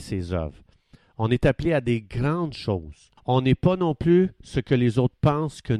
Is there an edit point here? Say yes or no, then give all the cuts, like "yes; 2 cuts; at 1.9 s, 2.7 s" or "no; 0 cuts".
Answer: yes; 1 cut; at 3.2 s